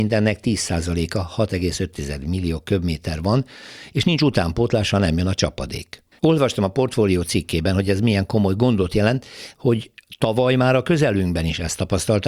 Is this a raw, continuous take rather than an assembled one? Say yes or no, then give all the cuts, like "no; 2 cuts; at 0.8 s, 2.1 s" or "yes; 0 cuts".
no; 2 cuts; at 6.1 s, 9.5 s